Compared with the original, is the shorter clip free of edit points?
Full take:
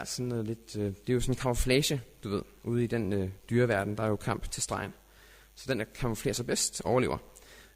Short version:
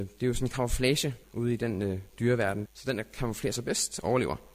no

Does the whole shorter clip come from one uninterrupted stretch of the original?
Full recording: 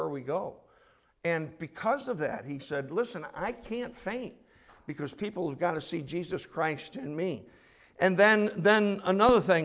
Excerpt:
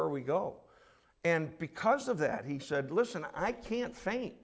yes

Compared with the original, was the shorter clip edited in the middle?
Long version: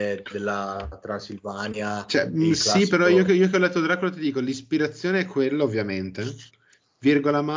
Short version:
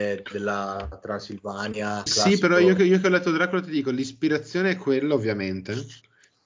yes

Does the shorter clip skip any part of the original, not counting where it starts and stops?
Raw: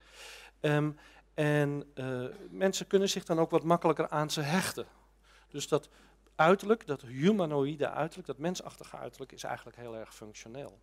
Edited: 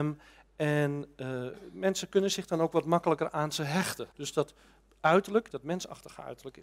yes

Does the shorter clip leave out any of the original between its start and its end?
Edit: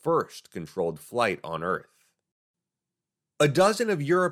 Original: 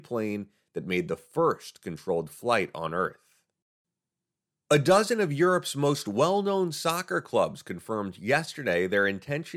no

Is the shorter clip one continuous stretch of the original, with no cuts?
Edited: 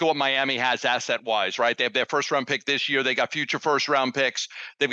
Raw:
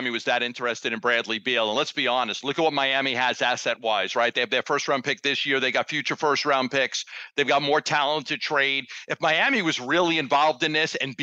yes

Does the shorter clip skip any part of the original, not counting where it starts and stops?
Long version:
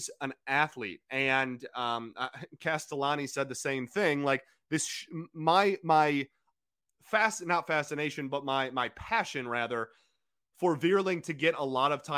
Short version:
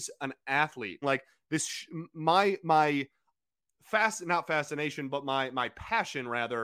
yes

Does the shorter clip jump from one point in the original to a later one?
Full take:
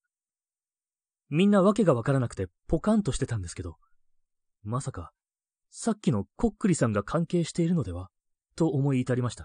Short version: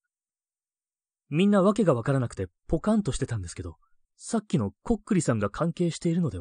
yes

